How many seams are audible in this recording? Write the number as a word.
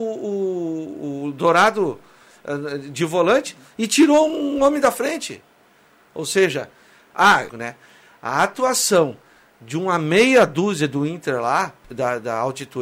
two